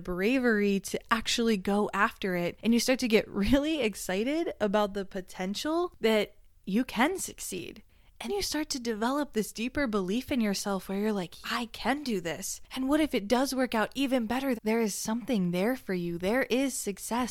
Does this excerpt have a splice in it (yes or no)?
yes